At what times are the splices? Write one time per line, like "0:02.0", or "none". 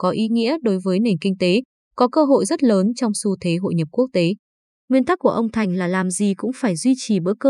0:04.7